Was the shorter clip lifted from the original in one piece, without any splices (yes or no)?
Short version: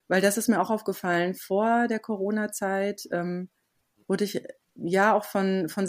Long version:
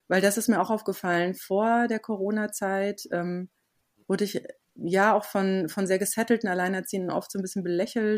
yes